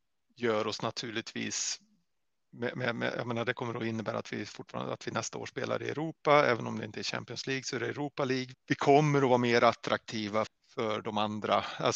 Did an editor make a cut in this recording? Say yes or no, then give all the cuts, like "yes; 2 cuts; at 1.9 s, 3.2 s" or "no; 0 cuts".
yes; 2 cuts; at 8.5 s, 10.5 s